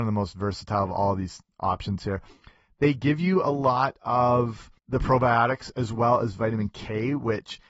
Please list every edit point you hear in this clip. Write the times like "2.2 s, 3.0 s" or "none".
4.8 s